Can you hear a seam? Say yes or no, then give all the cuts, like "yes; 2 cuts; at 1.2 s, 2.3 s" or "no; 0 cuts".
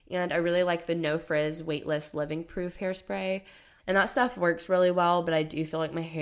yes; 1 cut; at 3.8 s